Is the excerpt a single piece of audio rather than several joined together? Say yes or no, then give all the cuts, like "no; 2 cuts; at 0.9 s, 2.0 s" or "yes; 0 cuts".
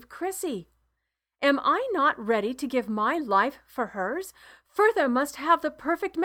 yes; 0 cuts